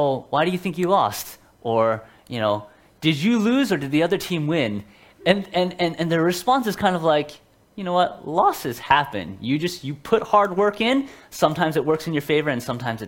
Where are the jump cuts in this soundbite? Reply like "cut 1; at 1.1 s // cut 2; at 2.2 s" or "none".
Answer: none